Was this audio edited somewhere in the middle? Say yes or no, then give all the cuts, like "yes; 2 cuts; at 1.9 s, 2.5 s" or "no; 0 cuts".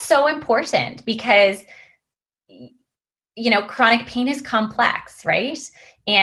no; 0 cuts